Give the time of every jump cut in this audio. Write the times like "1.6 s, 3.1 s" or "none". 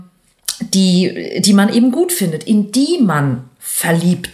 none